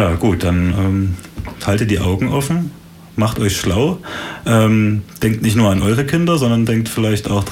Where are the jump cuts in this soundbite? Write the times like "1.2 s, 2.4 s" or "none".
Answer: 1.6 s